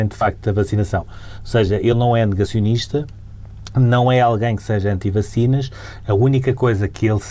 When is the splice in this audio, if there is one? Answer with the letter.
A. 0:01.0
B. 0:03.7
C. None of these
A